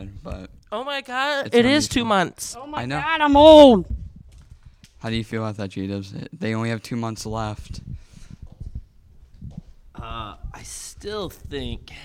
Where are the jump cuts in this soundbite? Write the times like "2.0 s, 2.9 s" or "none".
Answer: none